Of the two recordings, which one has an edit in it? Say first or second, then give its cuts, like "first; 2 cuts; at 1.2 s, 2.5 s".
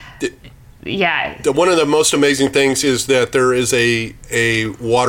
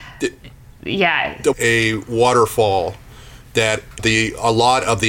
second; 2 cuts; at 1.5 s, 4.0 s